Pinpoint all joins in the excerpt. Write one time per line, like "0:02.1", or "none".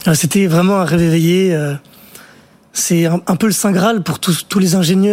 none